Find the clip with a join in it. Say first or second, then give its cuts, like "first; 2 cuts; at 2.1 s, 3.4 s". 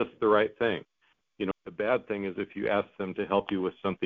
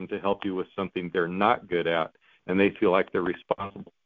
first; 1 cut; at 1.5 s